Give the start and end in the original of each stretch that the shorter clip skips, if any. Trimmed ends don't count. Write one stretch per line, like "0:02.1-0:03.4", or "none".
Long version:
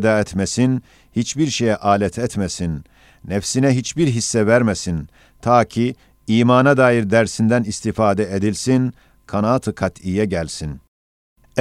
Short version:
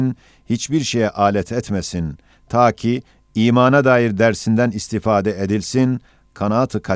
0:03.0-0:05.3